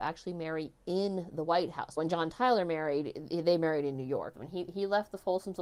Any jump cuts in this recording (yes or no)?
yes